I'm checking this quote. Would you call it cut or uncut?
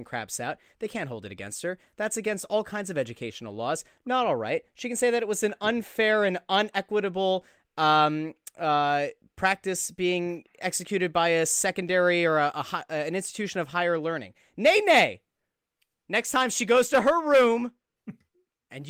cut